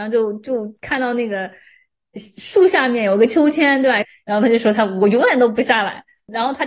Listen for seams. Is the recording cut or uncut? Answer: cut